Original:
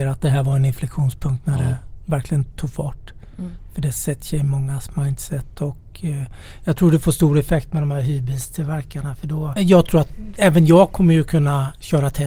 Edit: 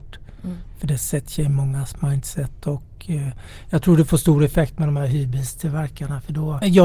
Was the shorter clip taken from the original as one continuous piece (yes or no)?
yes